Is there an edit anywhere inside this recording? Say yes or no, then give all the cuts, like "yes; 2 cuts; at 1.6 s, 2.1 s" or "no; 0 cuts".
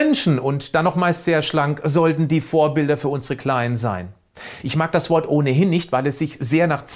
yes; 1 cut; at 4.6 s